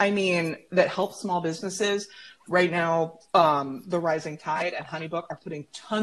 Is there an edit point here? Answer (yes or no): no